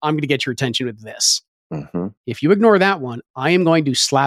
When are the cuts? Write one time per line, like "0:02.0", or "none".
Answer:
0:02.2